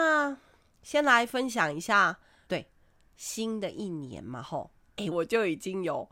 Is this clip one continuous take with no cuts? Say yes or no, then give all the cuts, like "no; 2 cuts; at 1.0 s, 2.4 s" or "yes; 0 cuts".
no; 2 cuts; at 2.5 s, 5.1 s